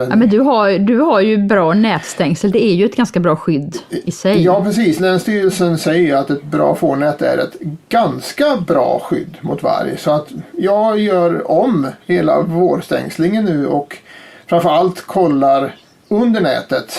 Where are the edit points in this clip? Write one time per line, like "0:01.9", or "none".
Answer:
none